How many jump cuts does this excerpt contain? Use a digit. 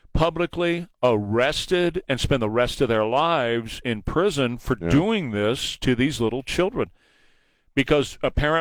0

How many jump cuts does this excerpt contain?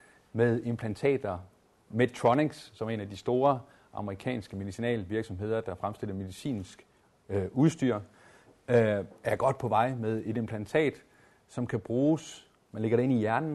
0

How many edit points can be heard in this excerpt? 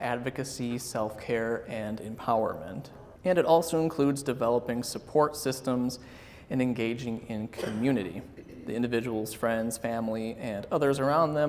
1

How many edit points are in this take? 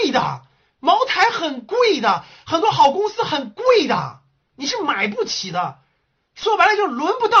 0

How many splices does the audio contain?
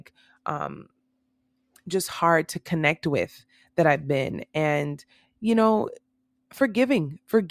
0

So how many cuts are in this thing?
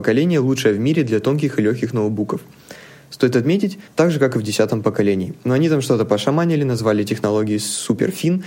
1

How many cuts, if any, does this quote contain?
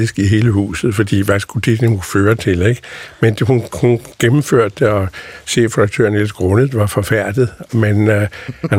0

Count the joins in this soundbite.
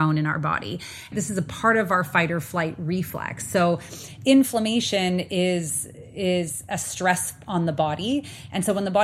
1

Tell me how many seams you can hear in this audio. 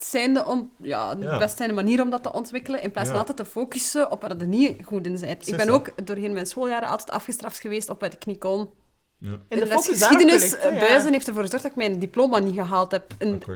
1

